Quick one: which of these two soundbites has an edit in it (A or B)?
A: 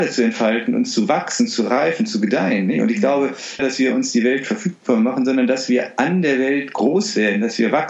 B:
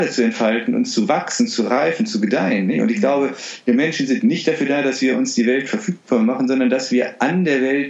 A